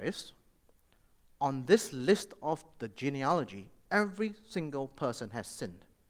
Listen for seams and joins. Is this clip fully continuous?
yes; 0 cuts

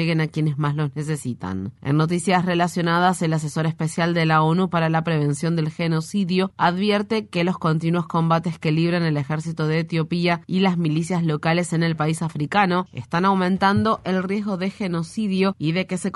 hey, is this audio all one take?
yes; 0 cuts

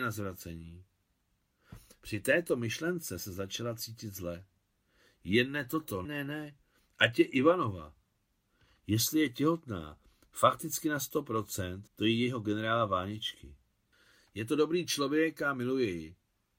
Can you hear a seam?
yes; 2 cuts; at 6.1 s, 11.9 s

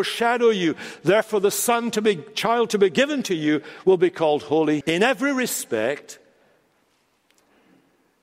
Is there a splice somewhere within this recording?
yes; 1 cut; at 4.8 s

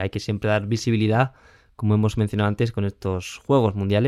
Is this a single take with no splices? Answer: yes; 0 cuts

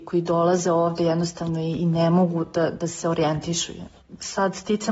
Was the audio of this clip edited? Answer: no; 0 cuts

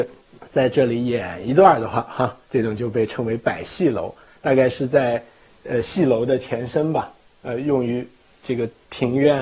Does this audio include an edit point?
yes; 1 cut; at 2.4 s

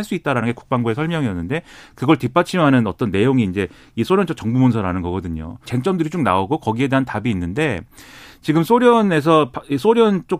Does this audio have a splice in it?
yes; 1 cut; at 5.6 s

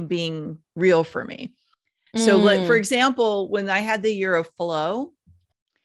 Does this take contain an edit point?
no; 0 cuts

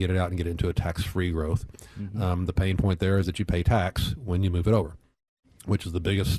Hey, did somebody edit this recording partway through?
no; 0 cuts

